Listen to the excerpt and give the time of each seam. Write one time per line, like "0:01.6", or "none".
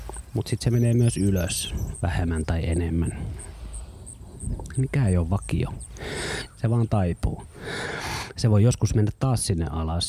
0:06.5